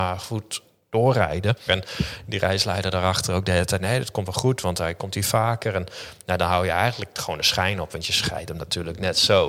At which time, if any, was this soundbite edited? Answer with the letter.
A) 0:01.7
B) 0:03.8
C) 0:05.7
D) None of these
A